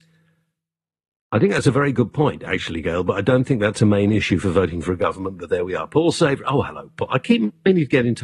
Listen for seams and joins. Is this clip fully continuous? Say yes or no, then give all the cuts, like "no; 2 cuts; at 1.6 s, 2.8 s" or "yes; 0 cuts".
yes; 0 cuts